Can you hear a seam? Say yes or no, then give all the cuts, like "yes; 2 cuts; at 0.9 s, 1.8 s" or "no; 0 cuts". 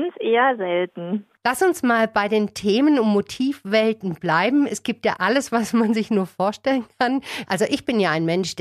yes; 2 cuts; at 5.2 s, 7.5 s